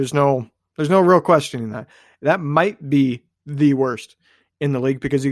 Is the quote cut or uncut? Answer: uncut